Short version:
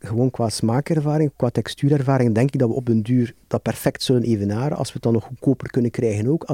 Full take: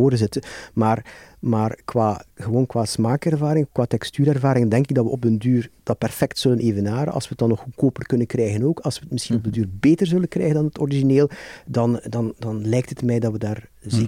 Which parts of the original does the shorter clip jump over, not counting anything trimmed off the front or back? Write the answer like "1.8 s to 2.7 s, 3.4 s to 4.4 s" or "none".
none

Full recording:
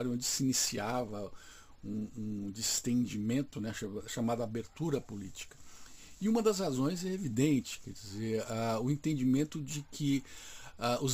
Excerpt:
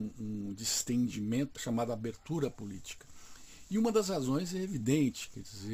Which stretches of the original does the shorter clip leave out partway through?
3.5 s to 4.1 s

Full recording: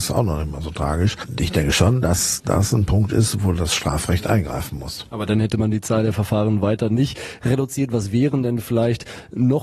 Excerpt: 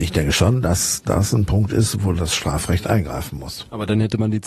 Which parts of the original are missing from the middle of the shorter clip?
none

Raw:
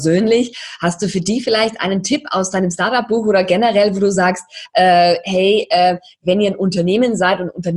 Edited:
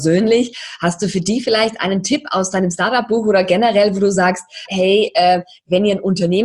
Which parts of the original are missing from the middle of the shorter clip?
4.7 s to 5.2 s

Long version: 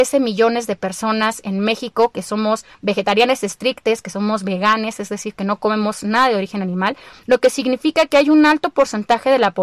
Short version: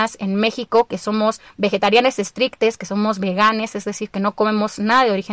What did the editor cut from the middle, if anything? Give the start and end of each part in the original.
none

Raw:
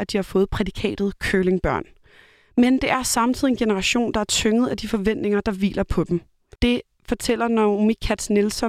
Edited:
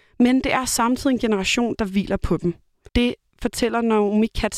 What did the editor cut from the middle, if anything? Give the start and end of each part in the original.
4.1 s to 5.4 s

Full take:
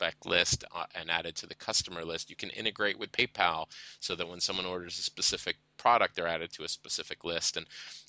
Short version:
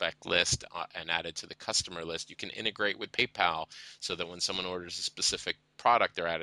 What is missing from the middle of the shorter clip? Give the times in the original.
none

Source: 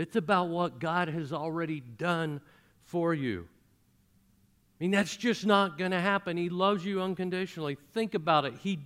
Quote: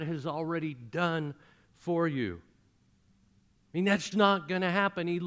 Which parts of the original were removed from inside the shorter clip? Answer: 5.2 s to 5.4 s

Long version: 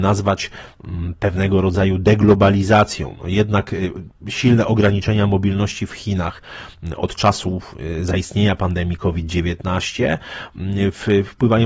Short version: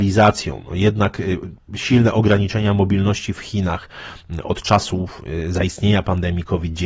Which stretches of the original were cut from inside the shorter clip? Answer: none

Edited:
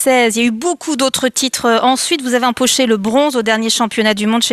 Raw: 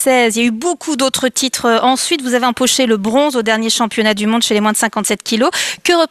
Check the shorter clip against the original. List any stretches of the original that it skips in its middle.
none

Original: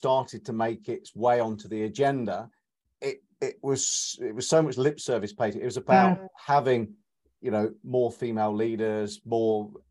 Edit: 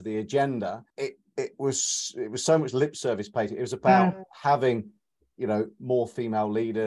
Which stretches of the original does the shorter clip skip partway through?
2.6 s to 2.9 s

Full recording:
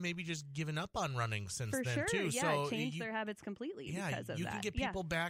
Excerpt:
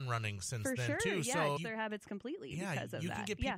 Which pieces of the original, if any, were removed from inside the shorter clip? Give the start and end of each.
2.6 s to 2.9 s

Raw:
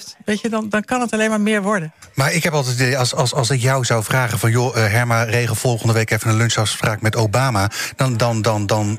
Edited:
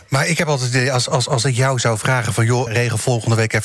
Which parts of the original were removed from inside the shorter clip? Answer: 4.7 s to 5.2 s

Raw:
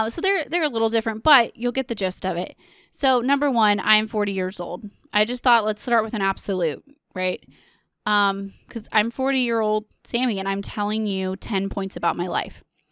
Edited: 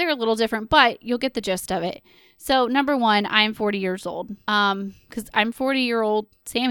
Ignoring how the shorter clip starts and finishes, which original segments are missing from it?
5.0 s to 8.0 s

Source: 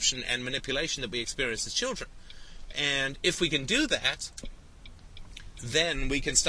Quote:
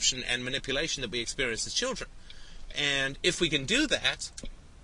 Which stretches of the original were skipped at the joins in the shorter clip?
none

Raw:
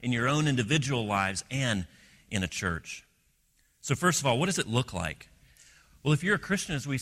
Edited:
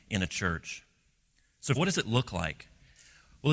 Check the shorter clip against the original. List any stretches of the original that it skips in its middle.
4.0 s to 4.4 s

